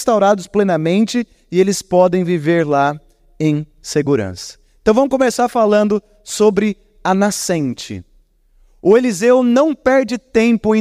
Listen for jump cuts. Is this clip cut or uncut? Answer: uncut